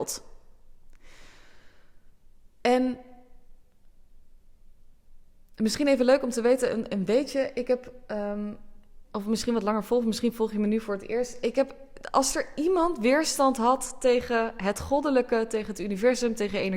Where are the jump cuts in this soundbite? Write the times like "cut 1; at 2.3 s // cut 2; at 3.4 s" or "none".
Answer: cut 1; at 9.0 s